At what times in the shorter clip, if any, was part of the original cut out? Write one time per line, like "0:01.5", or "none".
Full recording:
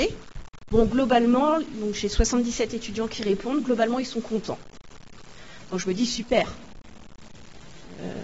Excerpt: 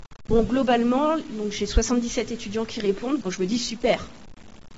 0:03.2